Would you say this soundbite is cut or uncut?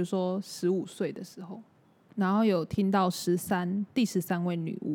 uncut